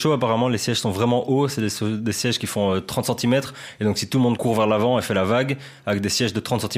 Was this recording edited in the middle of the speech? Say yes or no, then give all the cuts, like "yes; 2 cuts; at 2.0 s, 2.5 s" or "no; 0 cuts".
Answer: no; 0 cuts